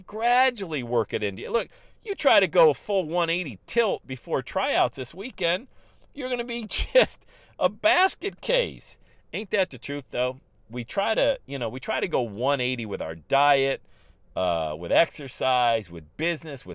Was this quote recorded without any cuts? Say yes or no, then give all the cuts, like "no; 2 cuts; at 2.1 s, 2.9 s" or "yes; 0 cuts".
yes; 0 cuts